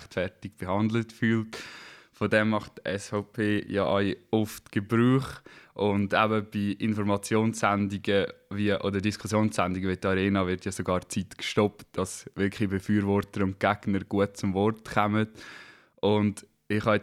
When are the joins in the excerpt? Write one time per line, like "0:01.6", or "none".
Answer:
none